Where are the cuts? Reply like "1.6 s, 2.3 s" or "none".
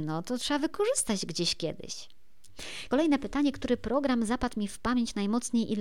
none